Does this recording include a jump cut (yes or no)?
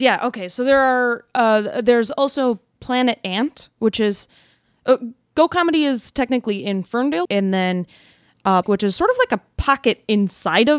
yes